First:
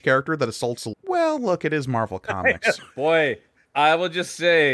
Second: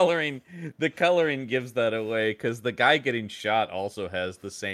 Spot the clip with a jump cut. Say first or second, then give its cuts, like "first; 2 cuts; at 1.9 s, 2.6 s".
first; 2 cuts; at 0.9 s, 2.8 s